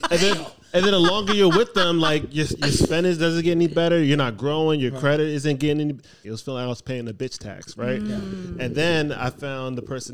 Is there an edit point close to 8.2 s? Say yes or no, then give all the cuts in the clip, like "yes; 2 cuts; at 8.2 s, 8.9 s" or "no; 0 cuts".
no; 1 cut; at 6.2 s